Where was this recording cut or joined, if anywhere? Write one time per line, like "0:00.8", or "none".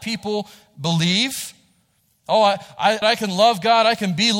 0:03.0